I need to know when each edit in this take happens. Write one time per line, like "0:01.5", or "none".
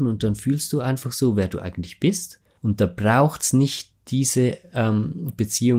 0:02.6